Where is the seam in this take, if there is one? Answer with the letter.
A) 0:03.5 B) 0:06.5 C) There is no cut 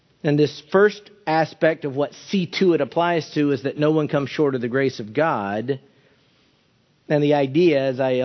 C